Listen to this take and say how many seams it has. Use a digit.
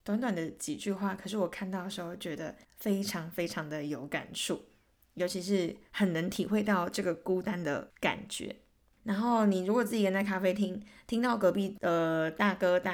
1